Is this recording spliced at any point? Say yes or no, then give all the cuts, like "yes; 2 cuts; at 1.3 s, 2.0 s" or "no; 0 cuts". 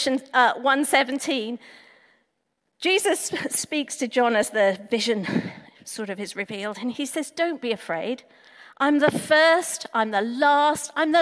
no; 0 cuts